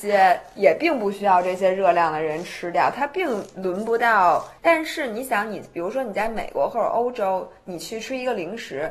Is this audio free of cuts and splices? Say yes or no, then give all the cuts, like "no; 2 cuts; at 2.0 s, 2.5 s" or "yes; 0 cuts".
no; 1 cut; at 4.6 s